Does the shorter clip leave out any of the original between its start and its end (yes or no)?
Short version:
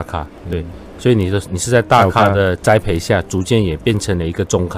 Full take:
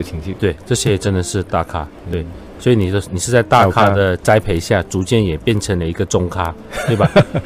no